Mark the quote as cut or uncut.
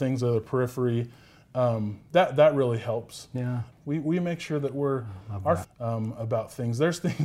cut